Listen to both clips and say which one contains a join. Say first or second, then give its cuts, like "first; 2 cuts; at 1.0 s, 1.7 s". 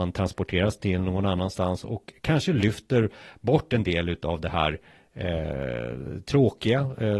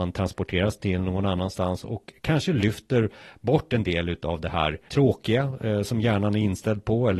second; 1 cut; at 4.9 s